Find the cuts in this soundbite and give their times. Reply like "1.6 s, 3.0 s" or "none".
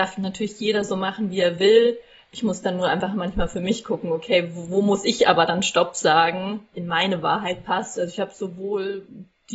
6.7 s, 8.0 s